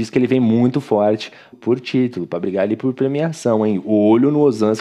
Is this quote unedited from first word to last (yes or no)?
no